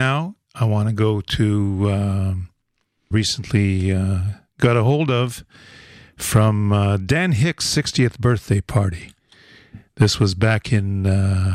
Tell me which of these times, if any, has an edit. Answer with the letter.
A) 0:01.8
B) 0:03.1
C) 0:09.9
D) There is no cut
B